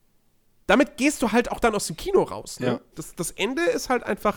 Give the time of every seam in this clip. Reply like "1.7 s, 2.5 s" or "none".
2.9 s